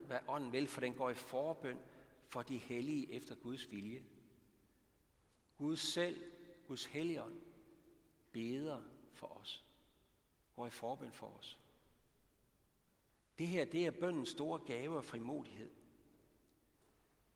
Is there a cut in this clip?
no; 0 cuts

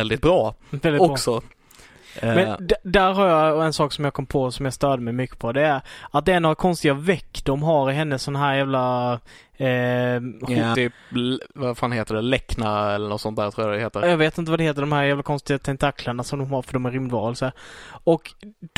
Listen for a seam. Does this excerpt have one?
yes; 1 cut; at 10.7 s

